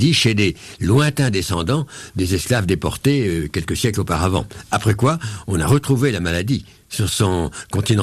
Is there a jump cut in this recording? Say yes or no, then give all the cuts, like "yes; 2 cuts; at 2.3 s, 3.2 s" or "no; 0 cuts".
no; 0 cuts